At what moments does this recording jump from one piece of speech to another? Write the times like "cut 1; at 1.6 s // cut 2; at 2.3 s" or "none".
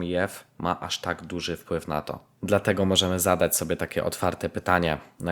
none